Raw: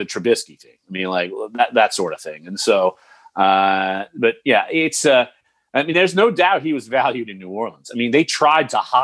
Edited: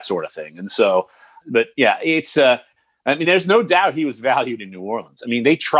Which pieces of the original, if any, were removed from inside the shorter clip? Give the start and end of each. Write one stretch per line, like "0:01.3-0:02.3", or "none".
0:03.3-0:04.1